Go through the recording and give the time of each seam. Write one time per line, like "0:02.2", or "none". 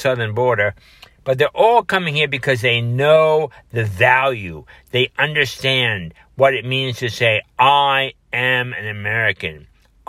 none